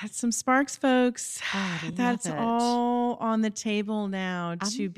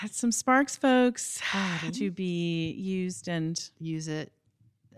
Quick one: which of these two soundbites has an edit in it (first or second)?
second